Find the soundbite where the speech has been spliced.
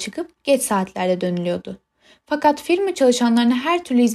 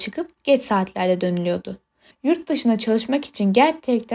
second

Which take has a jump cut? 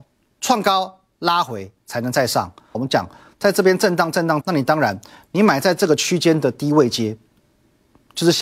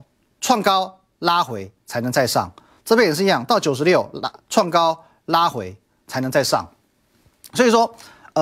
first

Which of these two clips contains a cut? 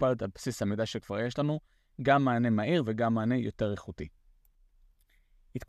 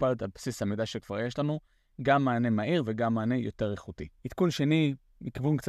second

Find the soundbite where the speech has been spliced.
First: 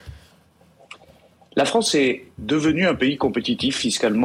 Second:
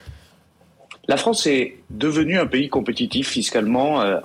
second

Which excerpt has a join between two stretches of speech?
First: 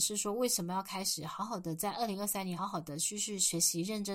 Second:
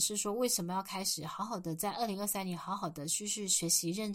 first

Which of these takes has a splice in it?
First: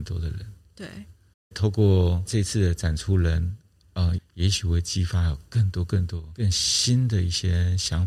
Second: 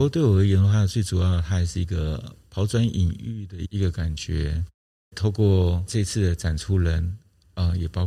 first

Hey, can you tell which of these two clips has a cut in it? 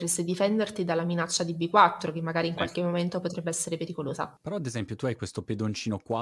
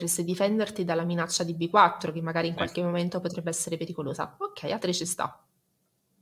first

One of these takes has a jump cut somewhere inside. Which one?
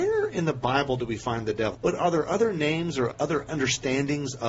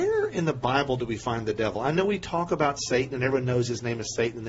first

